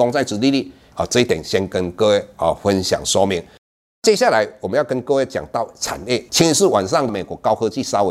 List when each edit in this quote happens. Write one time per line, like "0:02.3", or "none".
0:00.9